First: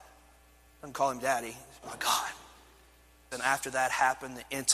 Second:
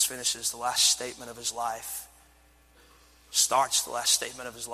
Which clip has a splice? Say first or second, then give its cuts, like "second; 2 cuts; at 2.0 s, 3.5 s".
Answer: first; 1 cut; at 3.3 s